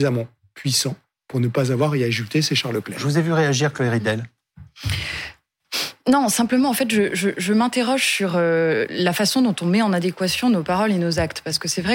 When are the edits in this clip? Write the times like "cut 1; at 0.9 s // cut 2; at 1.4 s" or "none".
none